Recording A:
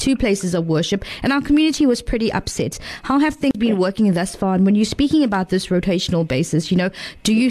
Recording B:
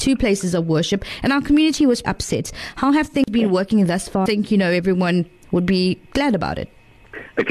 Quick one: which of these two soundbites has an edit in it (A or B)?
B